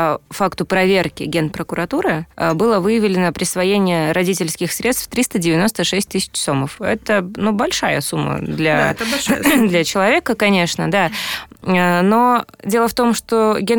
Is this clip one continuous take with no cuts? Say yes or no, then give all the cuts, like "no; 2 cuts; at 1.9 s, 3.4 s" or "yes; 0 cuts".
yes; 0 cuts